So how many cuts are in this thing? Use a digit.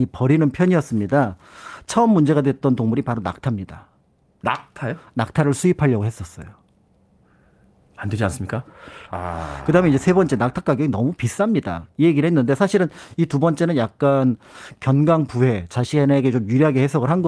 1